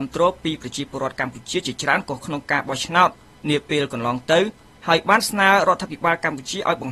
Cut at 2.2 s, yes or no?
yes